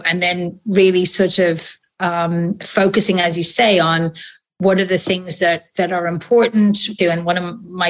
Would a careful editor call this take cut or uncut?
cut